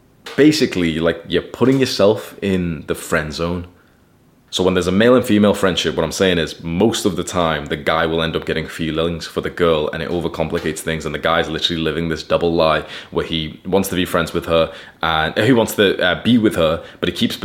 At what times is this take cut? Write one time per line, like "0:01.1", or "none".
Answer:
0:04.5